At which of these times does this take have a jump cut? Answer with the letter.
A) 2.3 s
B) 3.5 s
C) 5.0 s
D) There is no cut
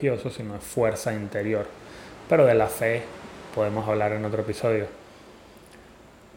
D